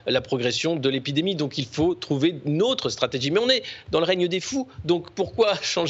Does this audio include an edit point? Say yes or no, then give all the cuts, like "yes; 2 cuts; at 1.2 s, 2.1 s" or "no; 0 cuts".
no; 0 cuts